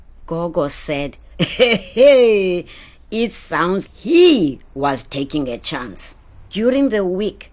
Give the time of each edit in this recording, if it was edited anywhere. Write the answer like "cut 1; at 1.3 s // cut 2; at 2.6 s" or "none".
cut 1; at 3.9 s // cut 2; at 6.5 s